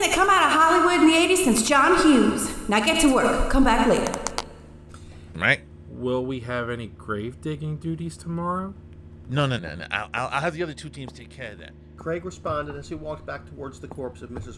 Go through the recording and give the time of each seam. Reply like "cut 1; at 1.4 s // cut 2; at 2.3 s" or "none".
cut 1; at 5.3 s // cut 2; at 9.6 s

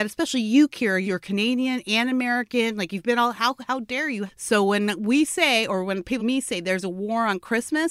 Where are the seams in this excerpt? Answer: cut 1; at 1.0 s // cut 2; at 4.3 s // cut 3; at 6.2 s

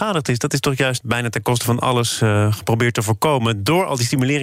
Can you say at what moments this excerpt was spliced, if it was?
cut 1; at 1.0 s

